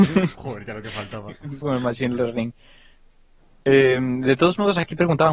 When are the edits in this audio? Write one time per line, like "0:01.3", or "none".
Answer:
0:01.6